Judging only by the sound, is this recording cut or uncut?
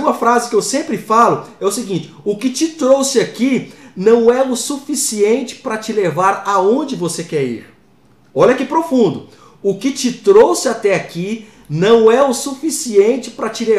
uncut